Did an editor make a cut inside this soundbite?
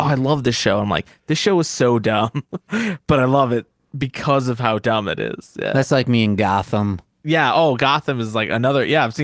no; 0 cuts

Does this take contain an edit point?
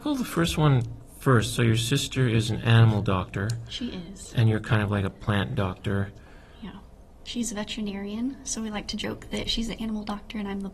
yes; 1 cut; at 7.2 s

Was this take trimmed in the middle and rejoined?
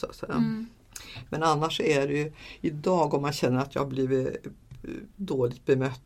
no; 0 cuts

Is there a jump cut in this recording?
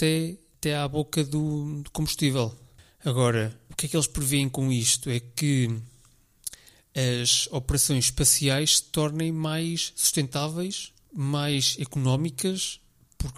no; 0 cuts

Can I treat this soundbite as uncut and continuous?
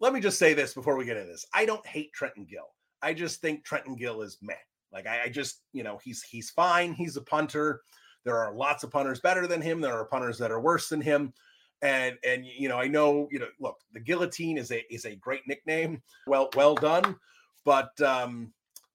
no; 1 cut; at 16.3 s

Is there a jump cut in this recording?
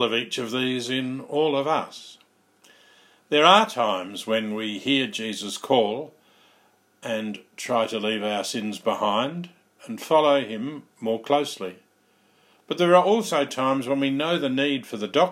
no; 0 cuts

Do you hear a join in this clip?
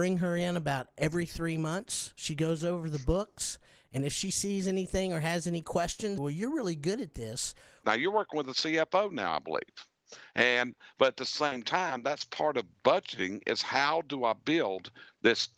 yes; 2 cuts; at 6.2 s, 7.8 s

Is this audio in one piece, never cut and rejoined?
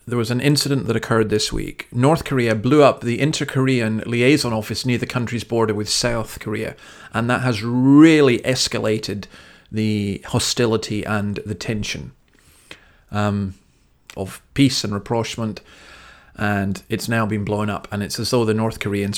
no; 1 cut; at 14.1 s

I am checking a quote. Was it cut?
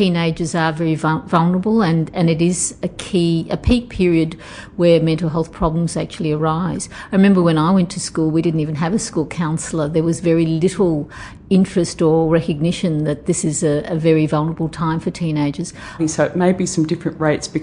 yes; 1 cut; at 16.0 s

